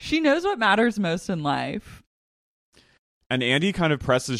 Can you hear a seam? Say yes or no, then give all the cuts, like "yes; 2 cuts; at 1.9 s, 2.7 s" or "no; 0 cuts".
no; 0 cuts